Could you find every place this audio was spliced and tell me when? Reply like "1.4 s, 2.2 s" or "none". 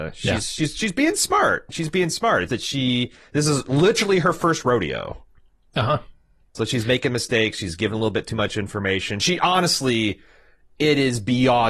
2.5 s